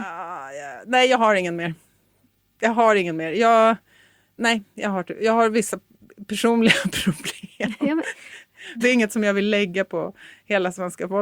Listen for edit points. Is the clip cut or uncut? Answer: cut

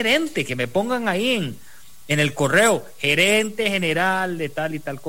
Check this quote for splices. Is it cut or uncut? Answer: uncut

